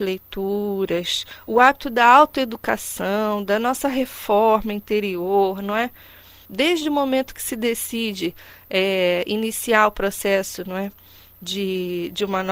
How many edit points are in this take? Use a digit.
1